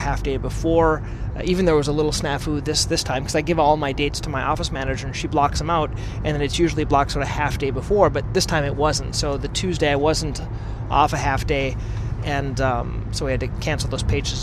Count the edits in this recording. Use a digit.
0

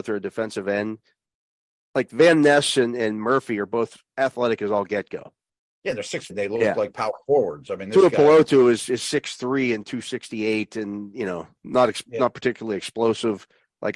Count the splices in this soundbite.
1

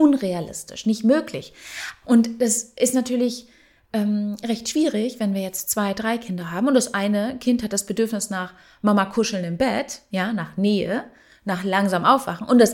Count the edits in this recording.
1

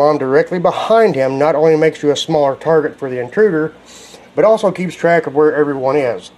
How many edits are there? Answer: 0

